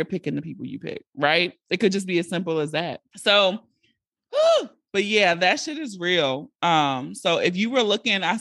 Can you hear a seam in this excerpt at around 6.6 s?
no; 1 cut; at 3.1 s

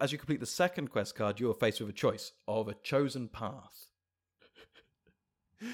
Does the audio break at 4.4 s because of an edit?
yes; 1 cut; at 4.4 s

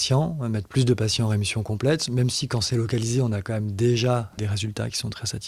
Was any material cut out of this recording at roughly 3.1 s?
no; 1 cut; at 4.4 s

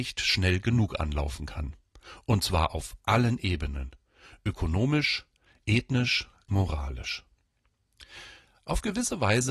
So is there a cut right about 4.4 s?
no; 1 cut; at 6.5 s

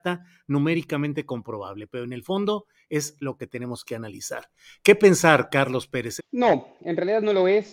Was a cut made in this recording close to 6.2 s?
yes; 1 cut; at 6.2 s

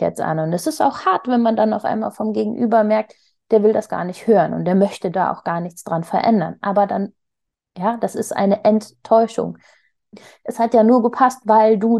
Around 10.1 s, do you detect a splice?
yes; 1 cut; at 10.1 s

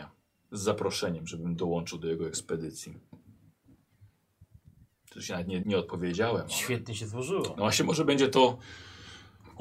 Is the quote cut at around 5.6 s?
yes; 1 cut; at 5.6 s

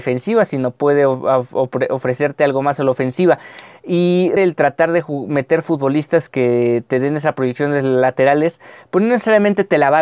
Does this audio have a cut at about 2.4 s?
no; 1 cut; at 4.4 s

